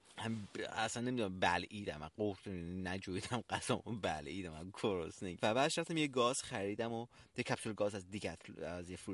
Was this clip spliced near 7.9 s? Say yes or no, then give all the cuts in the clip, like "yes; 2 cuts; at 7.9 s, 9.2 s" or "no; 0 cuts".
no; 1 cut; at 5.4 s